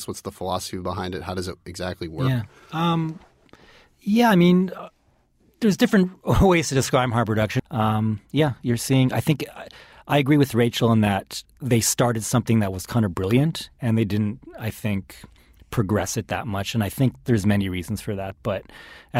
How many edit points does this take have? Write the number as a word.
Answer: one